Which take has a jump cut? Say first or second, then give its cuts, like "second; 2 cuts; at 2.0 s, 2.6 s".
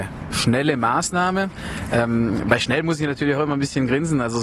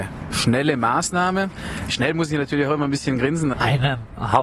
second; 2 cuts; at 1.9 s, 3.5 s